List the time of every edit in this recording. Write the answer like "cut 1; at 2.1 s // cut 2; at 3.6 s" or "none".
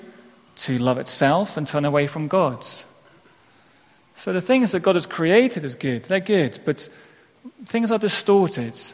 none